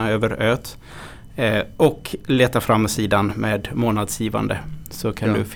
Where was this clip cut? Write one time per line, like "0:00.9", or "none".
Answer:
none